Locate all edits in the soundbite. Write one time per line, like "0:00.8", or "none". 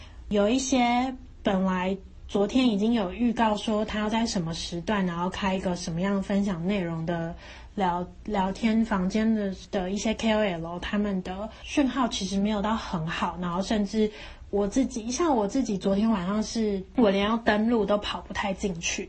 none